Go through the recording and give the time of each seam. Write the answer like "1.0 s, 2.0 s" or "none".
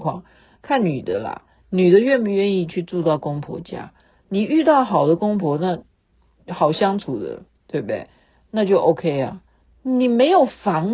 9.7 s